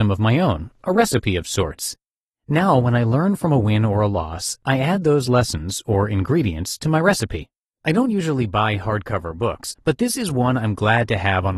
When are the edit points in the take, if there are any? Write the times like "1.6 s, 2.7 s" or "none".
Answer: 7.7 s, 9.8 s